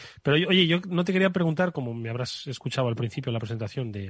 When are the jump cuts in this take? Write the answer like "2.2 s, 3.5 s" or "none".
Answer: none